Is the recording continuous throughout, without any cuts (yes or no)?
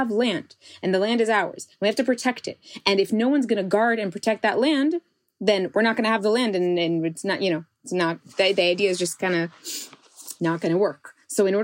no